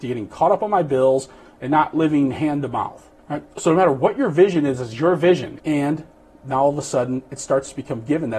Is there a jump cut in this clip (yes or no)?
yes